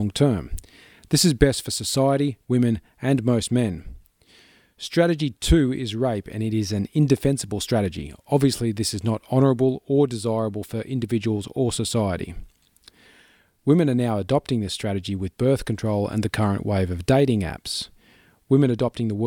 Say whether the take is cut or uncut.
cut